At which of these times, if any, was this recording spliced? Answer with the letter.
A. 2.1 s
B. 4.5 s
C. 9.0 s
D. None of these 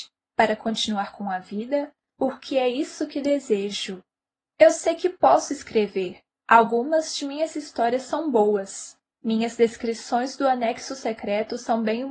A